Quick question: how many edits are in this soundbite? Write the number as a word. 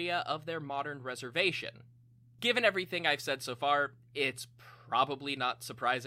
one